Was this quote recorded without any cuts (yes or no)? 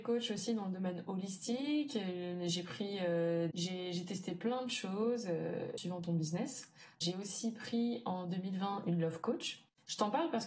no